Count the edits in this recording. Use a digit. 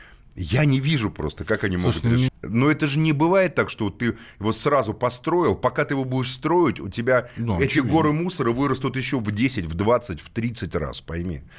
1